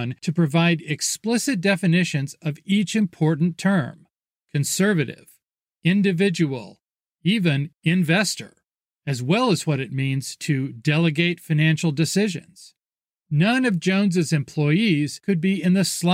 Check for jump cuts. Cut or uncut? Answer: uncut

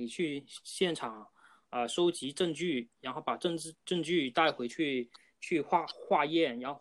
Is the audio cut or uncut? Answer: uncut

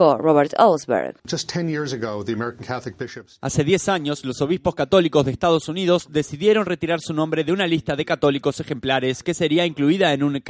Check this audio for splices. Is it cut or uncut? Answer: uncut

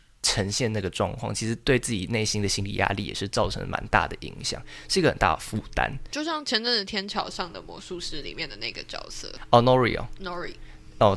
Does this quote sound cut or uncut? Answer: uncut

